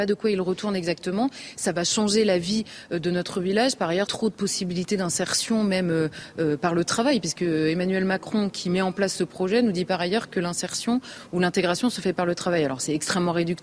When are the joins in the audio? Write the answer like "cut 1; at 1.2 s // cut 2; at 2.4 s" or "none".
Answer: cut 1; at 4.1 s